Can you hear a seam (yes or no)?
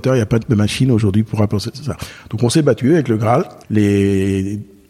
no